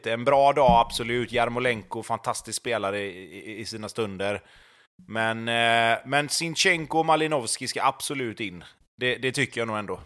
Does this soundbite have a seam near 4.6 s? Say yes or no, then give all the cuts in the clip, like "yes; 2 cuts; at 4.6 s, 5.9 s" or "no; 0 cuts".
no; 0 cuts